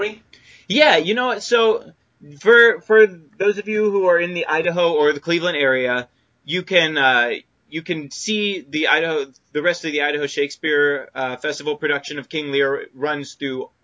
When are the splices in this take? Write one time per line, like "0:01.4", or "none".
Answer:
none

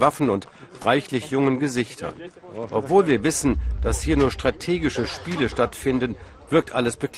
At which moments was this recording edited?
none

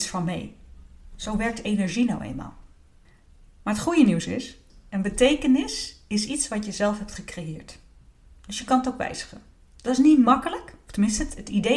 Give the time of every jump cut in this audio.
none

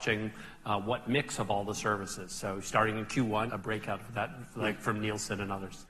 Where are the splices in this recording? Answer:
0:03.5

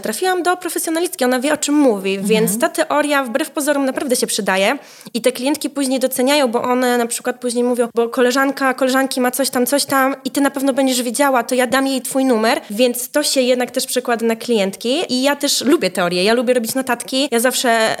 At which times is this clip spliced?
0:07.9

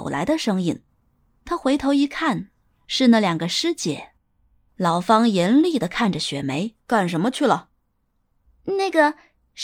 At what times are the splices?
0:04.7
0:06.8

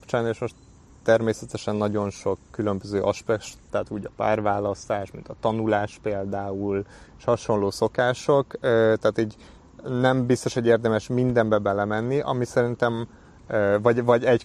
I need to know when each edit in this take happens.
0:03.7

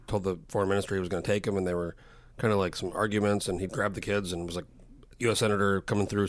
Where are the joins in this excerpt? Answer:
0:03.7

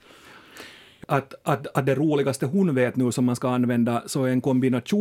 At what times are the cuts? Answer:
0:01.0

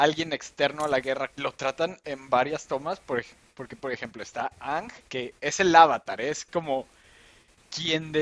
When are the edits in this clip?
0:01.3
0:05.1

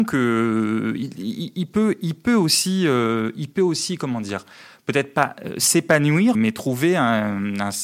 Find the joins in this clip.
0:06.3

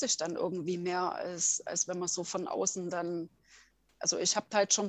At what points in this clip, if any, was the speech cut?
none

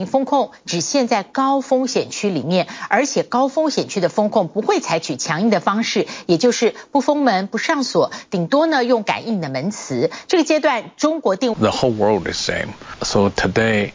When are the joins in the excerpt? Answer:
0:10.3
0:11.5

